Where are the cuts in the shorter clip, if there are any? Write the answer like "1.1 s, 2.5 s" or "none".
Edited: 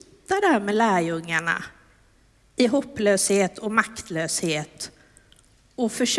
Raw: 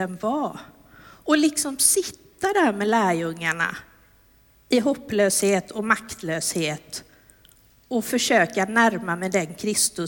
none